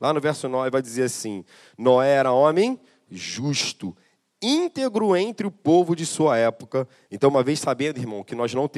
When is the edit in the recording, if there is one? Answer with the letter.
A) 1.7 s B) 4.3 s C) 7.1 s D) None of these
C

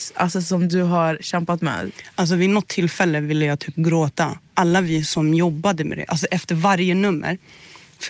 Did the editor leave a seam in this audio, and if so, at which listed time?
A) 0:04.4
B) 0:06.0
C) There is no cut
B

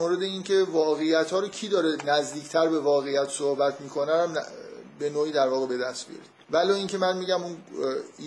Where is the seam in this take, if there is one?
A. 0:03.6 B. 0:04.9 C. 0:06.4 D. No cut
C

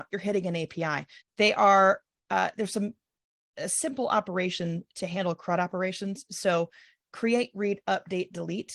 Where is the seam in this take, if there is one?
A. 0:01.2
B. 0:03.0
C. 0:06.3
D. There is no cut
A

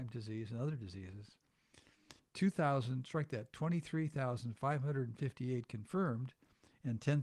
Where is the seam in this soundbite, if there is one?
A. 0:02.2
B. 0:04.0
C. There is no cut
A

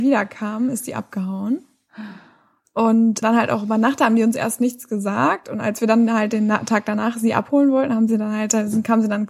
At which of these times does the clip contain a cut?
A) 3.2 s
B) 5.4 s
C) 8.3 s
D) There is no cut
A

